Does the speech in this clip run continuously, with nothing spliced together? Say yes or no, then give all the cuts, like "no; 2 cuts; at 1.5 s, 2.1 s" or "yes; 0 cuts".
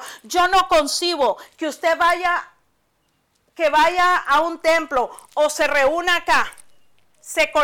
yes; 0 cuts